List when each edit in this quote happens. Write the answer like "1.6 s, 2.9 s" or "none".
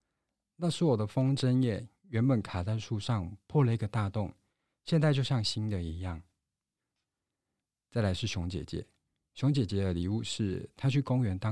none